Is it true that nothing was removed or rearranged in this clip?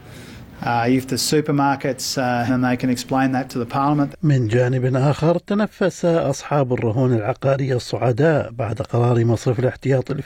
no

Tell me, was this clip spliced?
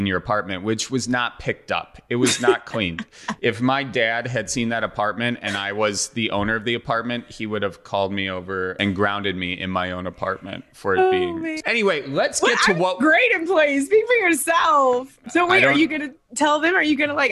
yes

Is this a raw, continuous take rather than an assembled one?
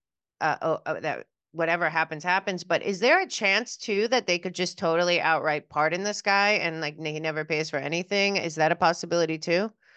yes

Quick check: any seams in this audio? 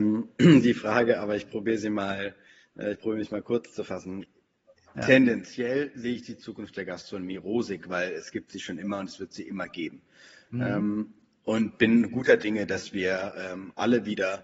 no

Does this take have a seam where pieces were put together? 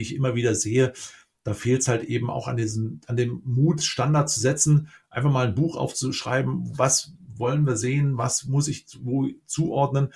no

